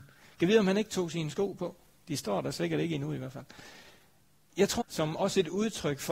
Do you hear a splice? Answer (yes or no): yes